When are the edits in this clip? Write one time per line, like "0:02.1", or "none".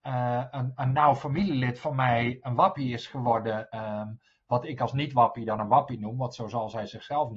none

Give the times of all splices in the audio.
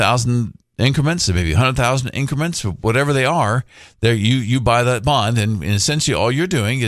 none

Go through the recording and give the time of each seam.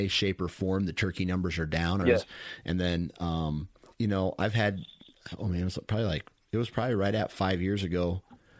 0:02.0
0:03.9

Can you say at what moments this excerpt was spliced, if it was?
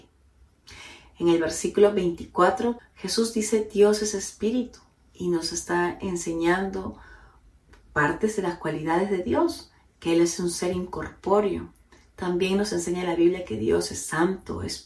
0:02.8

